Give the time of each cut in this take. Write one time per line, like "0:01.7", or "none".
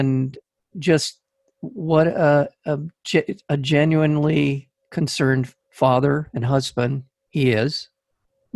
none